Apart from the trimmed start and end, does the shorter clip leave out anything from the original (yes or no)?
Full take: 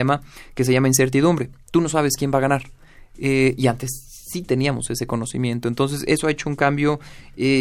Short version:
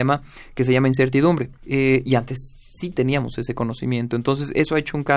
yes